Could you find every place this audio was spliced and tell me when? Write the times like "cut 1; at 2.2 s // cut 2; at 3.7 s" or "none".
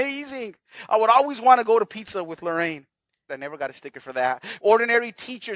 cut 1; at 3.3 s // cut 2; at 4.6 s